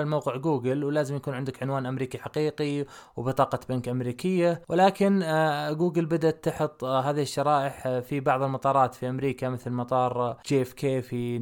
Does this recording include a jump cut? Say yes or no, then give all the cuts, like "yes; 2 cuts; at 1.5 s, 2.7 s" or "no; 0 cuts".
no; 0 cuts